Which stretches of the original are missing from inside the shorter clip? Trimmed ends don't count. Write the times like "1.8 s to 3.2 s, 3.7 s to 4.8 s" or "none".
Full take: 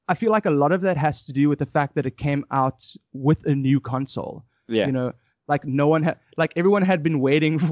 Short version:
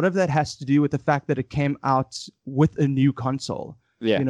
none